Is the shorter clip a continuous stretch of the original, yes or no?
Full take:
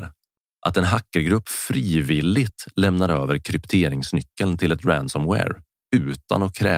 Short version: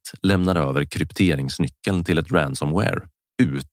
yes